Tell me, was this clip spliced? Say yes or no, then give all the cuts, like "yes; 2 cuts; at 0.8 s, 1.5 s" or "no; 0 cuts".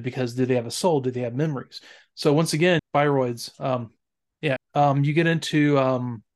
yes; 2 cuts; at 2.8 s, 4.6 s